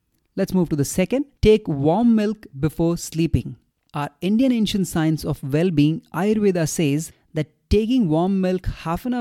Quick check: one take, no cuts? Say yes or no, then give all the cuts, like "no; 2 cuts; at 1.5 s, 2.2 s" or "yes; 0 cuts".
no; 1 cut; at 1.4 s